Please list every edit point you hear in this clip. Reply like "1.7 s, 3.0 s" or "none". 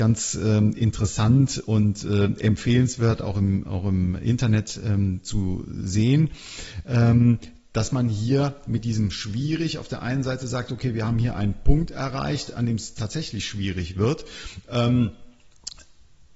none